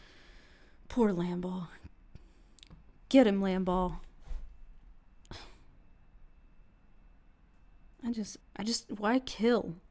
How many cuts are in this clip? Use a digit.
2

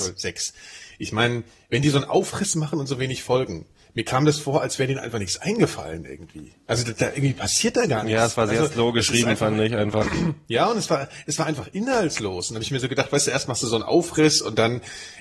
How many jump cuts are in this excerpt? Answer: 0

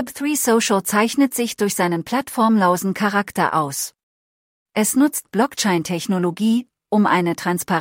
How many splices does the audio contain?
2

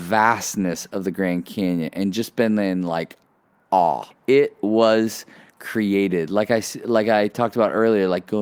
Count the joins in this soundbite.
1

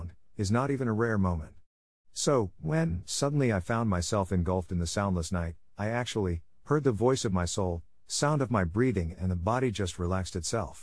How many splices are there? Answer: 0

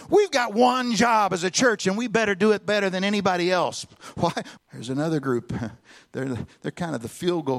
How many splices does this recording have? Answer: 1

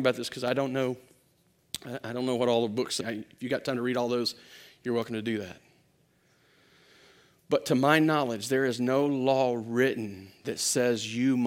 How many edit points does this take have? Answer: 1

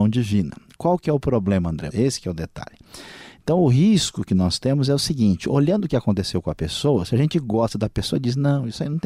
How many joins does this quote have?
1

